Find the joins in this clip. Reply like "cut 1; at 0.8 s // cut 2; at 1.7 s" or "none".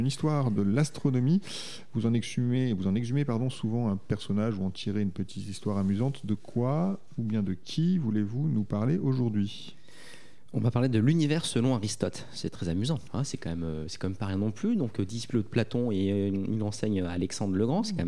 cut 1; at 13.1 s